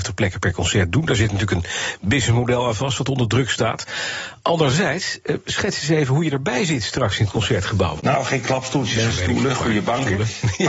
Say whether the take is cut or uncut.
cut